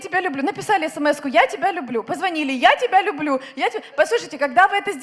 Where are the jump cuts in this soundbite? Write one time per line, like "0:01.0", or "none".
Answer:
none